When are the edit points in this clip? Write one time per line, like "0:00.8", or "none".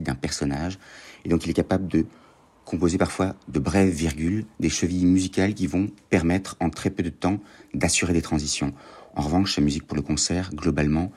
none